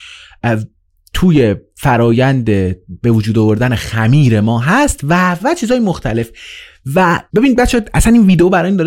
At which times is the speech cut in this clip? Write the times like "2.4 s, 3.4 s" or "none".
5.4 s, 7.3 s